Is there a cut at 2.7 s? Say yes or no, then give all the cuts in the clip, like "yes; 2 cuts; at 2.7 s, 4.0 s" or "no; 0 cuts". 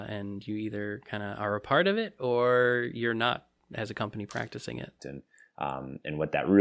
no; 1 cut; at 5.0 s